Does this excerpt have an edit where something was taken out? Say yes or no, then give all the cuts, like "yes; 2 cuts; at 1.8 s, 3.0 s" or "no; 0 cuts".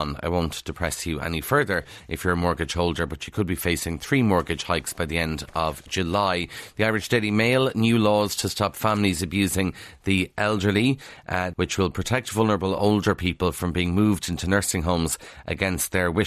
yes; 1 cut; at 11.5 s